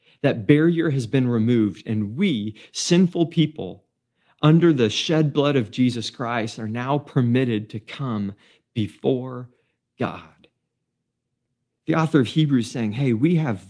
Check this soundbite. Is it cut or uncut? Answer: uncut